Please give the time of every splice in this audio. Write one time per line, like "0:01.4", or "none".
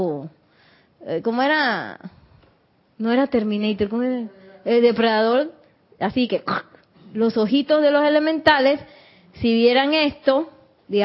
none